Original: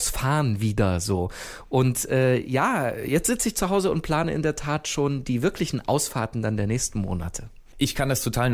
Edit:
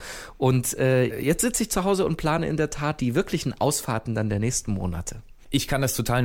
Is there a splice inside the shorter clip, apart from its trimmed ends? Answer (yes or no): yes